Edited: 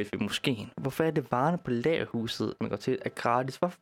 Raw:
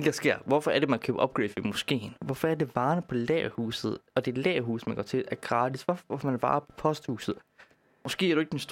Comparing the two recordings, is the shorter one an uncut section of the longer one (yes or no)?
no